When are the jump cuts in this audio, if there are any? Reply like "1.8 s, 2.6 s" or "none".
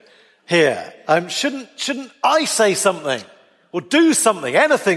none

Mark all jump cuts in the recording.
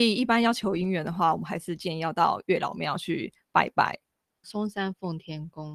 4.4 s

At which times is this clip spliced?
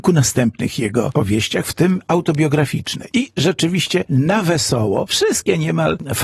3.1 s, 5.1 s

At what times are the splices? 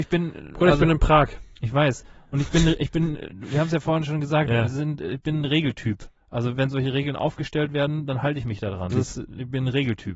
8.9 s

